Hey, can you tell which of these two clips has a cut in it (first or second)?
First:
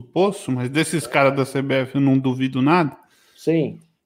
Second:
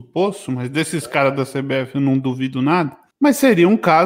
second